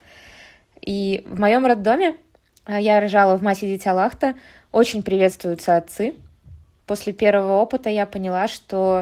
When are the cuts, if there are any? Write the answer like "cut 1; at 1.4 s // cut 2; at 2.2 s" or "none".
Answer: cut 1; at 6.8 s